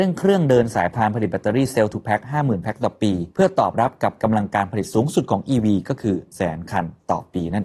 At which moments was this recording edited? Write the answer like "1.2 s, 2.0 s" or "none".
6.3 s

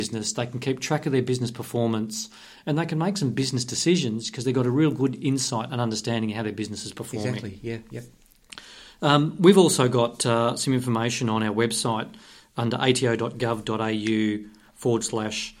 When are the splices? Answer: none

